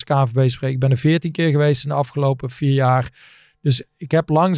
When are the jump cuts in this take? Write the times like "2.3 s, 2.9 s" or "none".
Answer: none